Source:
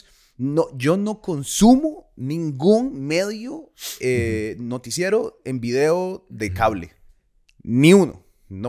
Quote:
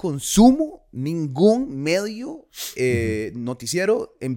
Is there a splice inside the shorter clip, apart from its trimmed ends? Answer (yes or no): no